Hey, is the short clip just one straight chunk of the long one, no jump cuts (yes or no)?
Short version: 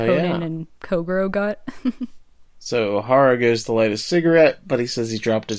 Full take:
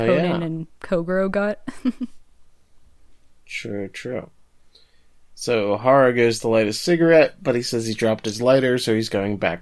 no